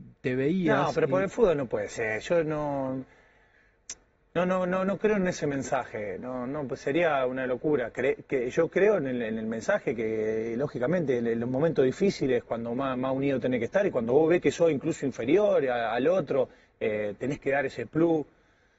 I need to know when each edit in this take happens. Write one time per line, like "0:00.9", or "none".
none